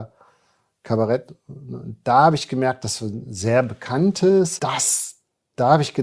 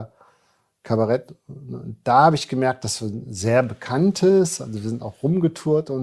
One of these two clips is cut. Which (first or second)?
first